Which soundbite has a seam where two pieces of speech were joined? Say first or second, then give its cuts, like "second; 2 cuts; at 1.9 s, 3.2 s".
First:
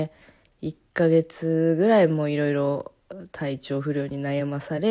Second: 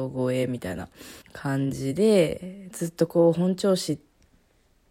second; 2 cuts; at 1.2 s, 2.7 s